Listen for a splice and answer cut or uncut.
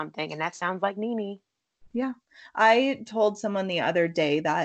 uncut